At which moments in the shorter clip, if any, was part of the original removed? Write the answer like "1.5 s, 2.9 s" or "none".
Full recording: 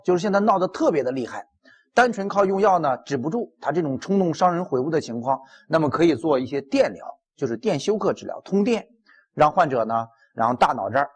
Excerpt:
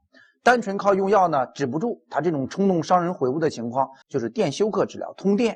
4.0 s

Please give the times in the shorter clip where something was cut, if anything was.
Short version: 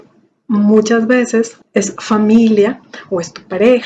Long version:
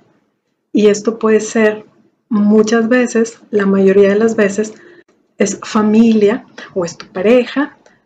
1.6 s

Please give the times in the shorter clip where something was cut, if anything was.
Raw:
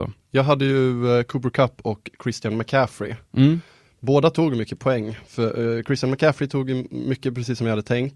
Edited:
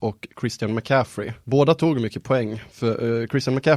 1.4 s

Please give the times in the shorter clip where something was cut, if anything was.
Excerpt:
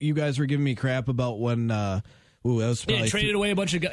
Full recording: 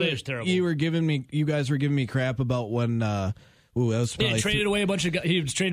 none

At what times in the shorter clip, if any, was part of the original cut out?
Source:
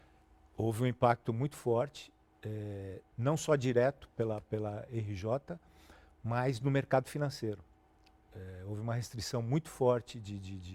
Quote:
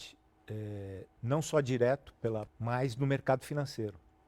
2.5 s

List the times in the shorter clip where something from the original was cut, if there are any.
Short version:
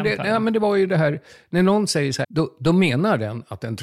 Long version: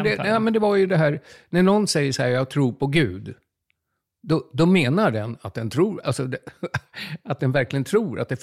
2.2 s

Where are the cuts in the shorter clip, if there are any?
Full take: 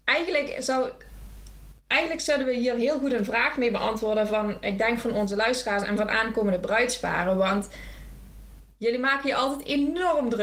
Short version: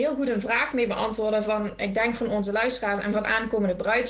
none

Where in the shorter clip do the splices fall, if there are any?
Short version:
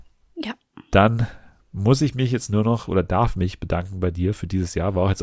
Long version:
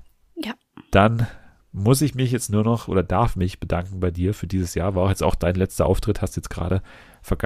none

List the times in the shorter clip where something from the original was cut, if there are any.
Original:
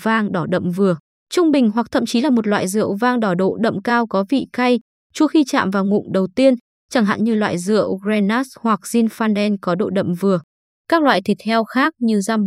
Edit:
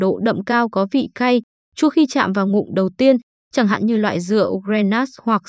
none

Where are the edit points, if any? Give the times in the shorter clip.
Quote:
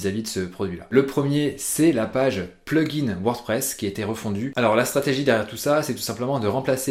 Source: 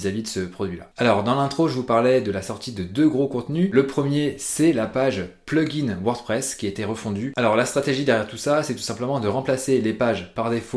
0.9 s

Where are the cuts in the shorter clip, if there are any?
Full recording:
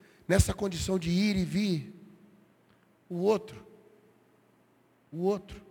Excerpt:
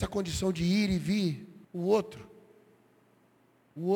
1.6 s

